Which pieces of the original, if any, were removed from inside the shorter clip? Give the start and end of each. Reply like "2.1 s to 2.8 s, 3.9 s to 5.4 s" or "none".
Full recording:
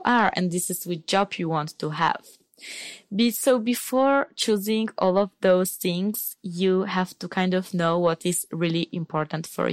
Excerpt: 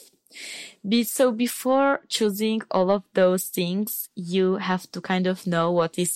none